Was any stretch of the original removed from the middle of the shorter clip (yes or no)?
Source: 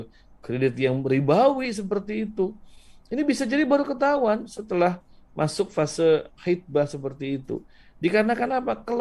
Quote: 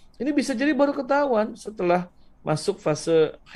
no